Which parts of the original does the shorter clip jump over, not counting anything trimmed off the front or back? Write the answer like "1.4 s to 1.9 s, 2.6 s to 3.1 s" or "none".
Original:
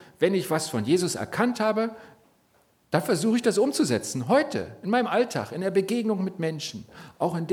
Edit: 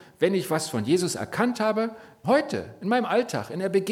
2.2 s to 4.3 s